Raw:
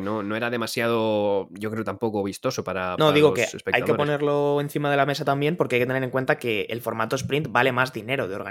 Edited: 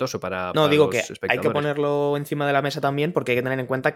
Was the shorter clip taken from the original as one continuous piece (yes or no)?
yes